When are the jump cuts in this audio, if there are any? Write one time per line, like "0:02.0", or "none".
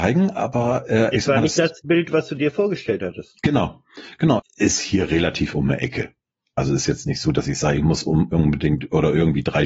0:04.4